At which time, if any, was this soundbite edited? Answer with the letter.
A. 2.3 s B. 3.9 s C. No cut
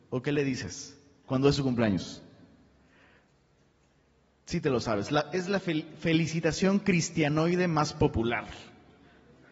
C